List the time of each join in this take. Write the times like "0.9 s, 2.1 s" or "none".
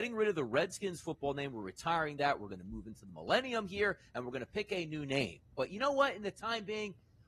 none